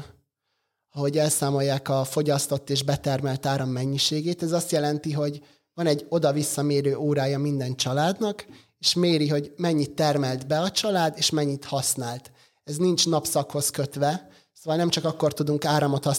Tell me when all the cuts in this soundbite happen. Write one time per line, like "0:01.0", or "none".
none